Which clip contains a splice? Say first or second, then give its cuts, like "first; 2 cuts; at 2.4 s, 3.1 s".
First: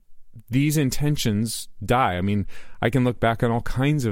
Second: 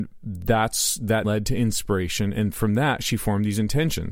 second; 1 cut; at 1.2 s